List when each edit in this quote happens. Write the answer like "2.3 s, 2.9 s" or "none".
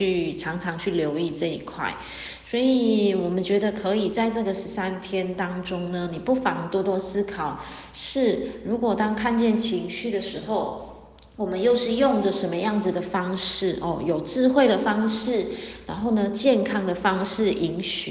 none